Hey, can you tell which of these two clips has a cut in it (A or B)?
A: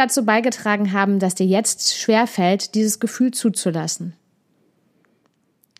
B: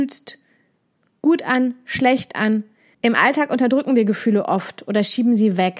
B